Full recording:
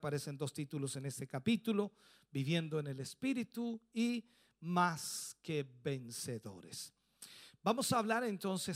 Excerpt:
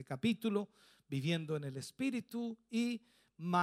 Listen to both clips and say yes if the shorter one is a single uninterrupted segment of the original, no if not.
yes